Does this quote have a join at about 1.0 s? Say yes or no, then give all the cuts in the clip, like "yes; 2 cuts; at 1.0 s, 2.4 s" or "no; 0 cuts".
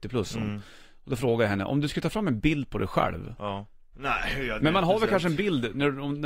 no; 1 cut; at 3.9 s